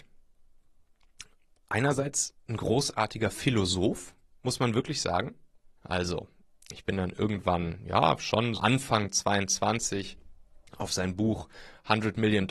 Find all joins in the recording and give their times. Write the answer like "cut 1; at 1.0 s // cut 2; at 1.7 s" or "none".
cut 1; at 5.8 s // cut 2; at 8.5 s // cut 3; at 10.7 s